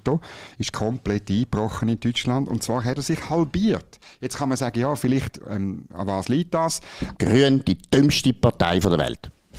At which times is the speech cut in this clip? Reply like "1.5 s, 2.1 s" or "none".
7.2 s